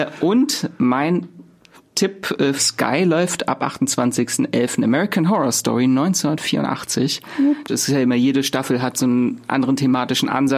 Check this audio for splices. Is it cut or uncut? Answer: cut